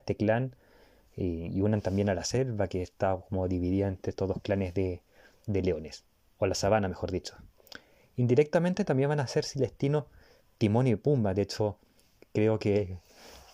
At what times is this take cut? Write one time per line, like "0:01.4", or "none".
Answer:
none